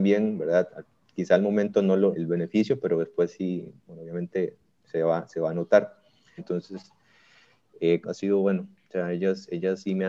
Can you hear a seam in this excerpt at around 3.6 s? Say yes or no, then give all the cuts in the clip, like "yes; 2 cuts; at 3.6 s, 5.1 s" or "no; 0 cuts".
no; 3 cuts; at 2.1 s, 6.4 s, 8.0 s